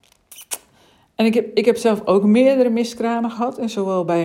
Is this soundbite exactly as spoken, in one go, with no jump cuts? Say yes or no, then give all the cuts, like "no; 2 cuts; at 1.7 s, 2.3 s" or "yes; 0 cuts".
yes; 0 cuts